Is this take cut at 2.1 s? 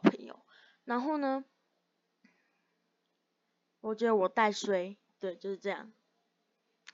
no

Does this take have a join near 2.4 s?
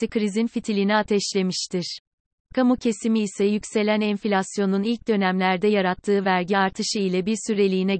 yes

